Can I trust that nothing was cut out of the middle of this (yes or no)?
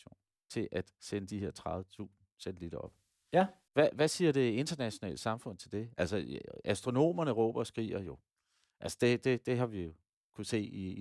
yes